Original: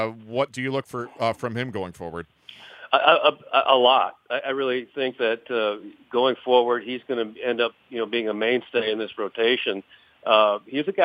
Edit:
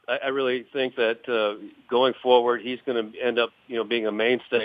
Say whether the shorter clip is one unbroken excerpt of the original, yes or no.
yes